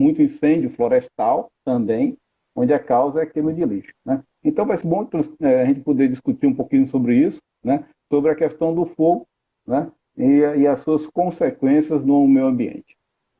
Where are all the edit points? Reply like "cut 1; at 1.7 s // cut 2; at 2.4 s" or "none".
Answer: cut 1; at 4.8 s